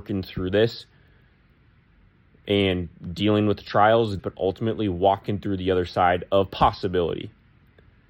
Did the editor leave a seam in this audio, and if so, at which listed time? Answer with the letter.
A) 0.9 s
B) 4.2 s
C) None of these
B